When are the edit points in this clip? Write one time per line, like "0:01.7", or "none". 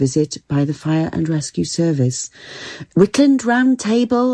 0:02.9